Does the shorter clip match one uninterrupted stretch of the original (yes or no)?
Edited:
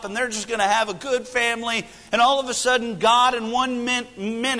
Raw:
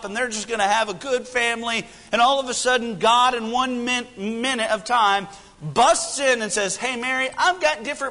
yes